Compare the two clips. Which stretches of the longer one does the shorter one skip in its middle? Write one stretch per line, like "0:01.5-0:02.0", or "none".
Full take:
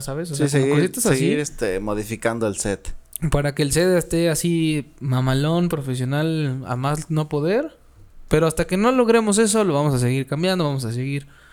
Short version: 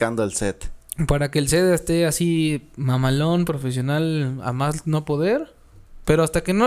none